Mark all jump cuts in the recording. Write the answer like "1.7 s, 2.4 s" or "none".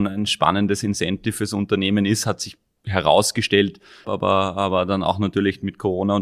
4.0 s